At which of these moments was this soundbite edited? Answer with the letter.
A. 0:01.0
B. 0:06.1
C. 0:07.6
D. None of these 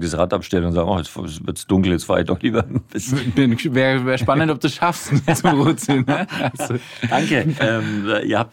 C